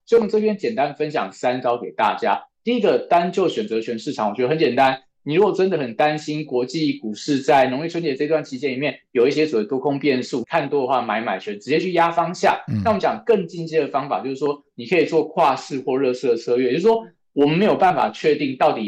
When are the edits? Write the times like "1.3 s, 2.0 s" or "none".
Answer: 10.4 s